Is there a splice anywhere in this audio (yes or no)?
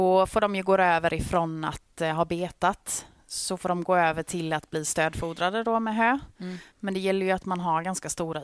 yes